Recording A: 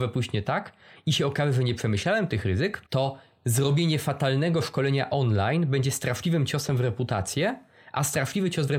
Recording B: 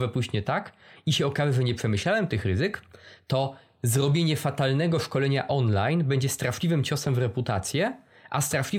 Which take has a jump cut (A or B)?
A